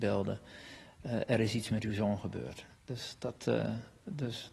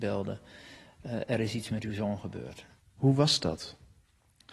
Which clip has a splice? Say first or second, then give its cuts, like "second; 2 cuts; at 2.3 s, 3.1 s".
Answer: second; 1 cut; at 2.8 s